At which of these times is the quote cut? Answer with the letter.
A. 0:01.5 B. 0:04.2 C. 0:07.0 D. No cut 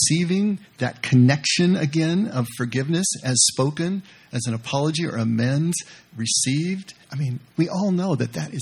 C